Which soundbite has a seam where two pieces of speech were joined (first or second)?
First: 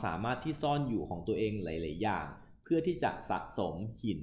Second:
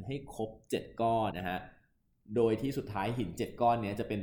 second